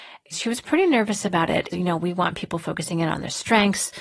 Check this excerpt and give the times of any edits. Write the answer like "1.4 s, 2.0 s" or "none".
1.7 s